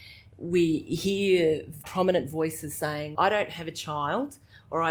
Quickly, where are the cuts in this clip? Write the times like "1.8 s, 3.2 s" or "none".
1.8 s, 3.1 s